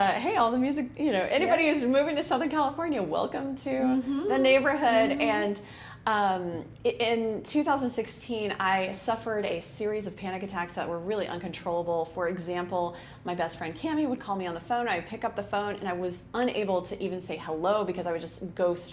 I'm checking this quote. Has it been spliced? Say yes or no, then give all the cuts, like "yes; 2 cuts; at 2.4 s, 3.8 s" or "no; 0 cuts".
no; 0 cuts